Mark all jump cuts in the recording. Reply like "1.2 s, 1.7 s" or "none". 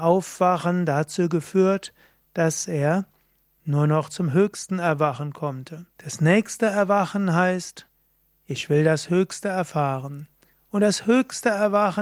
6.0 s